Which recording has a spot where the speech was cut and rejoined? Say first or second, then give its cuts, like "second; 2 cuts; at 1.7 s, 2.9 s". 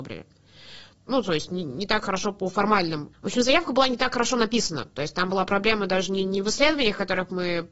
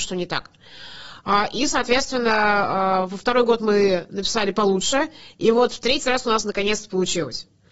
first; 2 cuts; at 1.1 s, 3.1 s